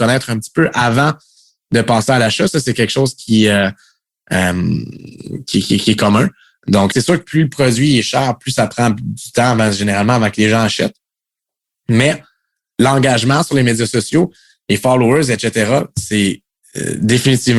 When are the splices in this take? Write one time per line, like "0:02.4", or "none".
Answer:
0:06.9